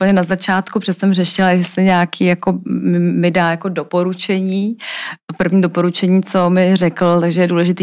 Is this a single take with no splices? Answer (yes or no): yes